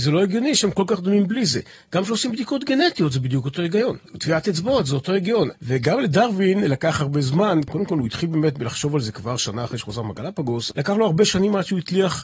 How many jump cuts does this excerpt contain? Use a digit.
2